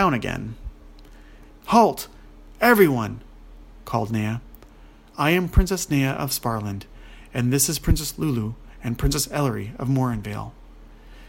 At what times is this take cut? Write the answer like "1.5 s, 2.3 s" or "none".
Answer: 1.5 s